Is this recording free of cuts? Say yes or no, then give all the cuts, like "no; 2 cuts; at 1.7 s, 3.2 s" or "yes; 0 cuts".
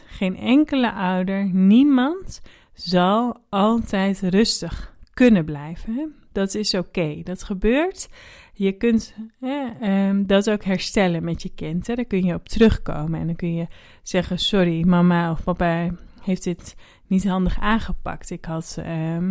yes; 0 cuts